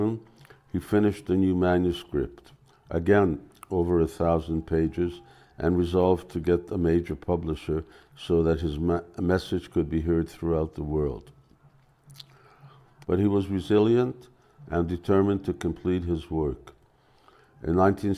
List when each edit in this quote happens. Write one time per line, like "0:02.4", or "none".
0:13.0

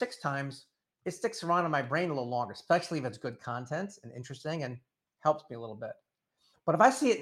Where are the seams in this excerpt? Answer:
none

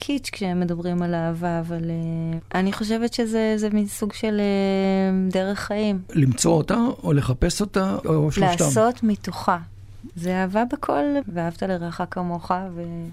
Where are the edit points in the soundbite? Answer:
0:08.0
0:10.1
0:11.2

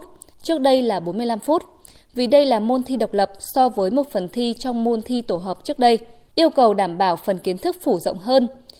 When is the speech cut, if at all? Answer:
none

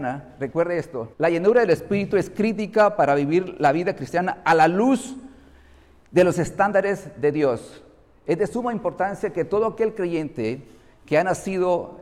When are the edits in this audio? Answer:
0:01.1

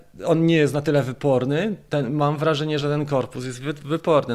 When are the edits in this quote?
none

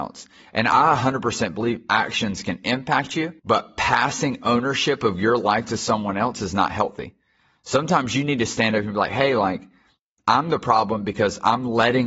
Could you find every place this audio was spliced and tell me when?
0:03.4

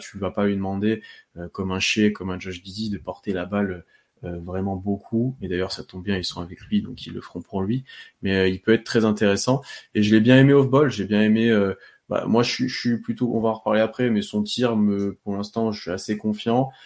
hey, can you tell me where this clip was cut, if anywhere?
none

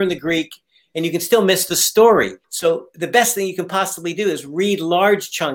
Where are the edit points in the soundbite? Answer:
0:02.4

